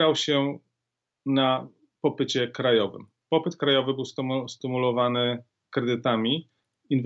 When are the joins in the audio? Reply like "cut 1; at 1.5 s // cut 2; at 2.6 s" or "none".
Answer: none

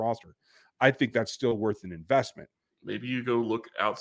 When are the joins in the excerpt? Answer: cut 1; at 2.7 s

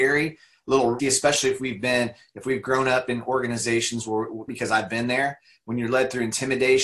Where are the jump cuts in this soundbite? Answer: cut 1; at 1.0 s // cut 2; at 4.5 s

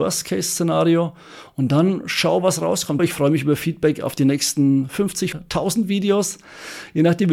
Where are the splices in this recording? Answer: cut 1; at 3.0 s // cut 2; at 5.3 s

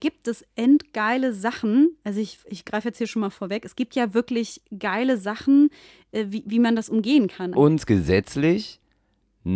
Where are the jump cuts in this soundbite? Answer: cut 1; at 7.5 s

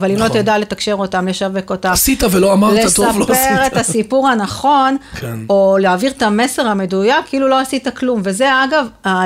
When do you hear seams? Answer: none

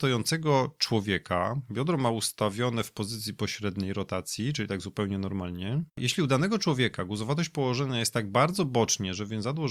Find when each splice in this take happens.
cut 1; at 5.9 s

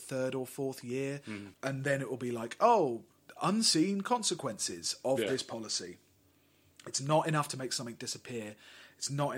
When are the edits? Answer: cut 1; at 1.5 s

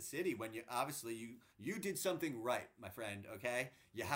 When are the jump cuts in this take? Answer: cut 1; at 1.5 s

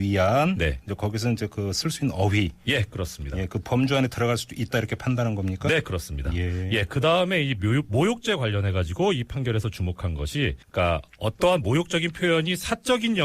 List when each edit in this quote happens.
cut 1; at 10.6 s

